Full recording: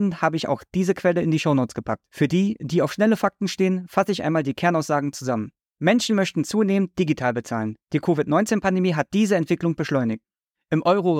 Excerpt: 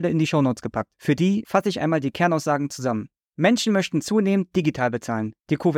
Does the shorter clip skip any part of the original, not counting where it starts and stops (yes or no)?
yes